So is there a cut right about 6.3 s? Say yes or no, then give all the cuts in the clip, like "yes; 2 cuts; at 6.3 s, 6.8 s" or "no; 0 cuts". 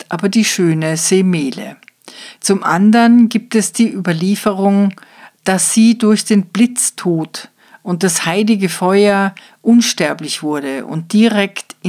no; 1 cut; at 2.4 s